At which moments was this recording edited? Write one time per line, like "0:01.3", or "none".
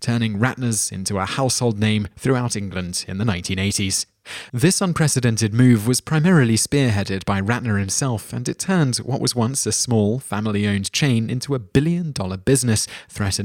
none